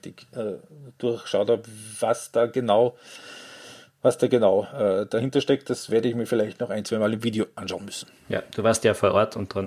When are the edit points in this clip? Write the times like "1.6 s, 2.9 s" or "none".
none